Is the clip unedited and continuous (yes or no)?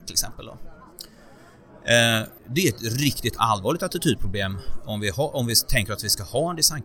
no